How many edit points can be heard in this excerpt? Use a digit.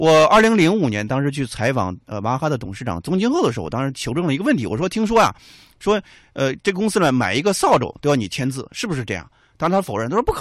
0